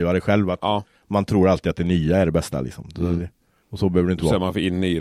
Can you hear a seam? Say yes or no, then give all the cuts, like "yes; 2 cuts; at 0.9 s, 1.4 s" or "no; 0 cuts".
no; 0 cuts